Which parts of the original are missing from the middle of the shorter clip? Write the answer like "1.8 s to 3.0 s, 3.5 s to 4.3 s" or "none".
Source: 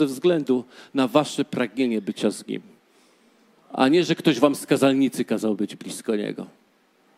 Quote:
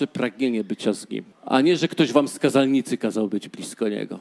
2.7 s to 3.6 s

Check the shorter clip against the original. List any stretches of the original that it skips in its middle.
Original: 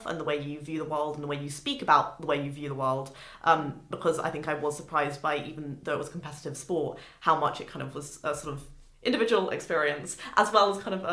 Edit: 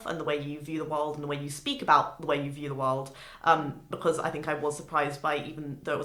none

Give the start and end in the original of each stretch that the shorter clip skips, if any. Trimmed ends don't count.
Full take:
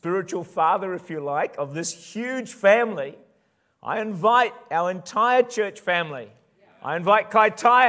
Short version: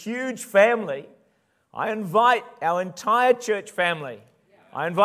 none

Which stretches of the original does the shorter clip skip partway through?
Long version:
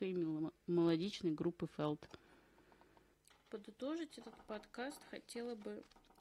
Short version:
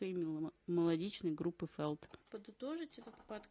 2.2 s to 3.4 s

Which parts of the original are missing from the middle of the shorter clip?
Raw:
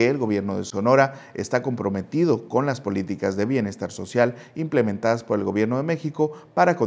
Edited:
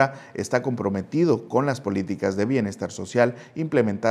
none

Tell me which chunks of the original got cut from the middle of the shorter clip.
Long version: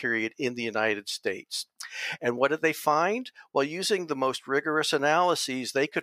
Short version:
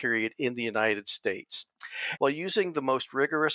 2.2 s to 3.5 s

